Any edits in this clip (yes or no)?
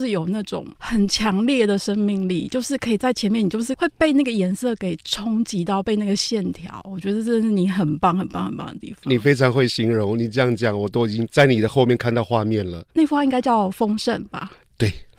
yes